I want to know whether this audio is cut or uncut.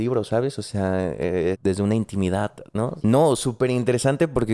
cut